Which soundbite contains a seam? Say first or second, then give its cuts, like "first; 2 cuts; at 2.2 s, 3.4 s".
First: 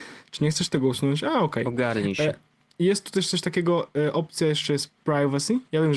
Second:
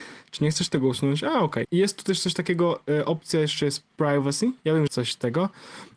second; 2 cuts; at 1.6 s, 4.9 s